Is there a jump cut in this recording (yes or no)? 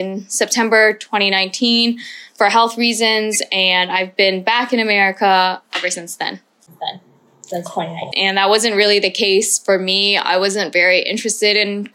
yes